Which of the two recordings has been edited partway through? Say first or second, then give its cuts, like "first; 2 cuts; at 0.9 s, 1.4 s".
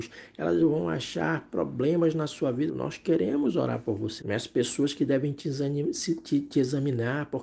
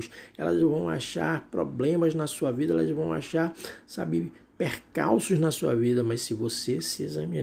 first; 2 cuts; at 2.7 s, 4.2 s